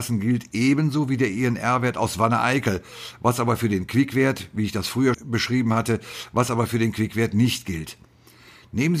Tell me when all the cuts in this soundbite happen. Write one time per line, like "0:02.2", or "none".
0:05.1